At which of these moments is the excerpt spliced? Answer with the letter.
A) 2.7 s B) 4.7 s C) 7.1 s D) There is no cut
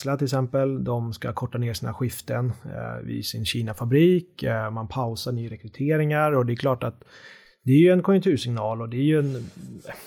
D